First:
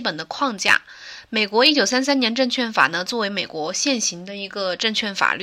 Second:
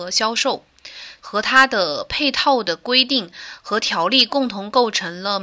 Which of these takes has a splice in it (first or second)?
second